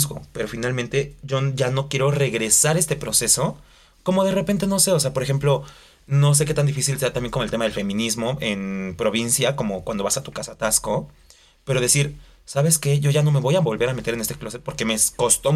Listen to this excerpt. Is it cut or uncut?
uncut